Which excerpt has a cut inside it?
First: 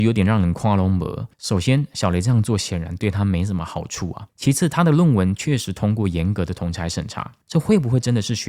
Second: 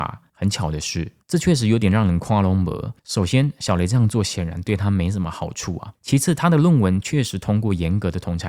second; 1 cut; at 1.2 s

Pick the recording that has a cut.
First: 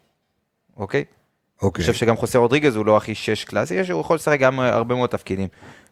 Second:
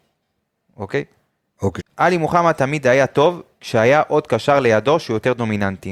second; 1 cut; at 1.8 s

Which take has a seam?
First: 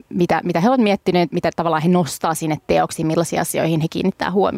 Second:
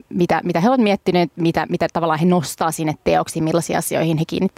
first; 1 cut; at 1.3 s

